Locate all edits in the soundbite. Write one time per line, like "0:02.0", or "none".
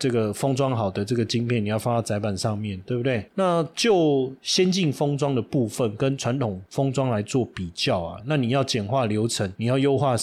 0:03.3
0:08.2